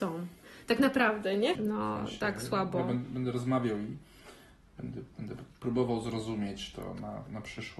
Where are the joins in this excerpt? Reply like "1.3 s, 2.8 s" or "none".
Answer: 1.5 s